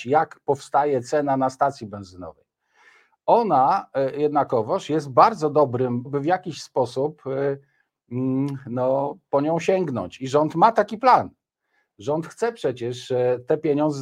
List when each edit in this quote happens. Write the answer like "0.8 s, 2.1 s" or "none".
6.0 s